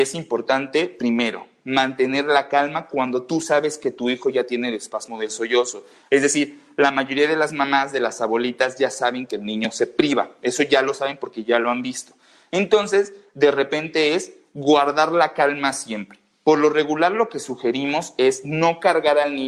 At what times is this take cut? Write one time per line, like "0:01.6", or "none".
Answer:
none